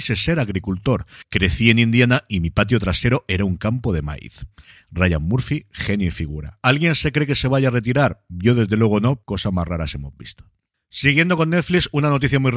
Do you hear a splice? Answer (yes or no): yes